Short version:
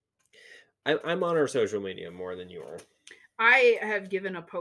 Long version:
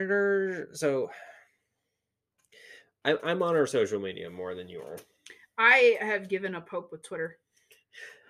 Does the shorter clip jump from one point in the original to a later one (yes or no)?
no